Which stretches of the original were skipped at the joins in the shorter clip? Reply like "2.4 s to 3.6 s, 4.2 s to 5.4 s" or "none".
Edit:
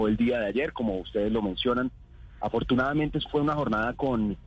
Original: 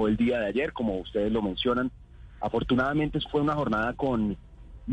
none

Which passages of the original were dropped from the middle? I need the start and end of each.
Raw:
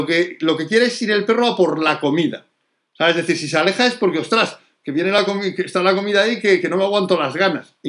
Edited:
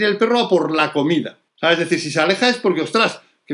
2.6 s to 2.9 s

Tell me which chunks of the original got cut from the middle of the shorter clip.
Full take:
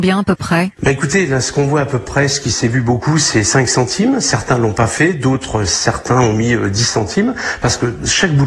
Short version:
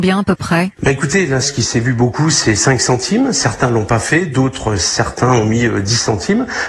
1.4 s to 2.3 s

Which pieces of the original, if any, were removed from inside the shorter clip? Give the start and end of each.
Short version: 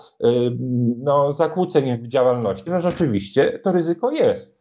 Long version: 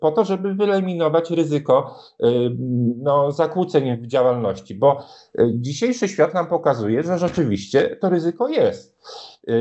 4.7 s to 7.0 s

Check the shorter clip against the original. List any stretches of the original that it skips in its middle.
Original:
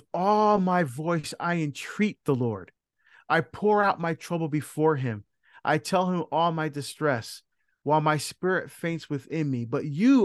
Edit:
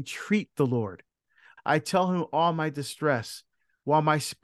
3.3 s to 5.6 s

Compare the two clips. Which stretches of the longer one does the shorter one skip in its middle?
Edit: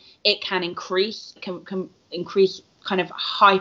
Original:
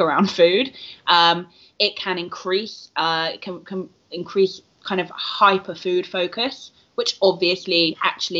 2.9 s to 3.4 s

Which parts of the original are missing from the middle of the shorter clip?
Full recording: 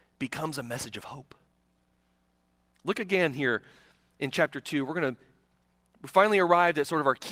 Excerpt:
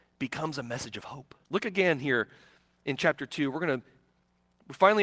1.4 s to 2.8 s

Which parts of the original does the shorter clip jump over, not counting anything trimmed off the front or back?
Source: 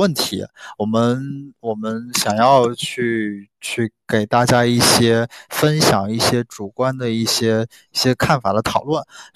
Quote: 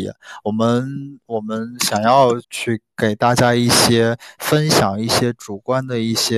2.7 s to 3.5 s

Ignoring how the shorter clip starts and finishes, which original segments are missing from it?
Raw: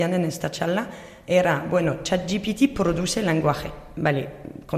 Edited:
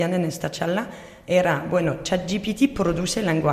none

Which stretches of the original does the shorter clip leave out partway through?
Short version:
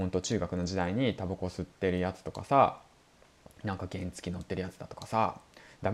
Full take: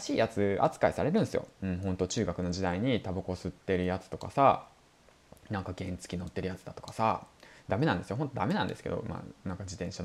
none

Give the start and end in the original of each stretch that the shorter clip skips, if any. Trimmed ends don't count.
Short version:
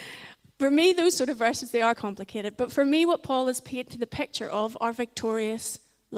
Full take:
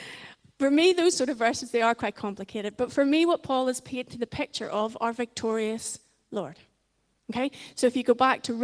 1.9 s to 2.1 s

